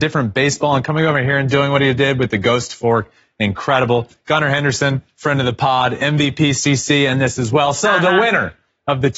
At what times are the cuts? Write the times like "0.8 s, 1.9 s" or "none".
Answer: none